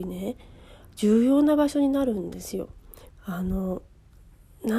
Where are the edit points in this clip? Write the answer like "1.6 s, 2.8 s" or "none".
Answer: 3.1 s